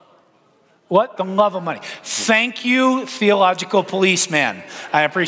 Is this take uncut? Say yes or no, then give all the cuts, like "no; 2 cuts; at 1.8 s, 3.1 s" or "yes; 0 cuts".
no; 1 cut; at 1.2 s